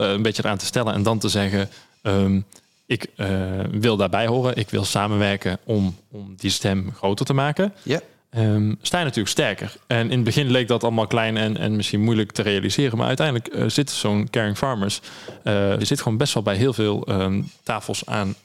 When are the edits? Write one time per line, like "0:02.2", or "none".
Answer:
0:15.8